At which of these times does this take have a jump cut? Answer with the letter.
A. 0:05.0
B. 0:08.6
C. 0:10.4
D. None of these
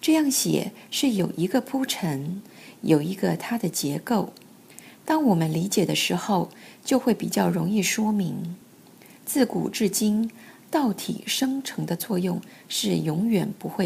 D